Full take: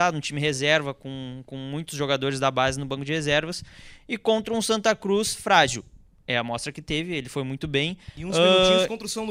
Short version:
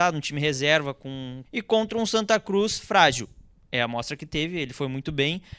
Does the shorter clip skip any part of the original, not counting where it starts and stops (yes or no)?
yes